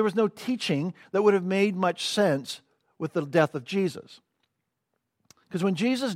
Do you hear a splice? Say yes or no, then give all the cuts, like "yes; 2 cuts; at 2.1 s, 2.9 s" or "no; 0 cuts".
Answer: no; 0 cuts